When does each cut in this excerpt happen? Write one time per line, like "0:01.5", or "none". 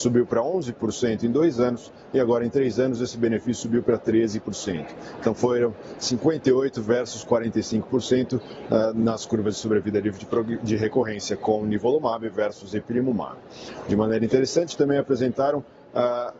none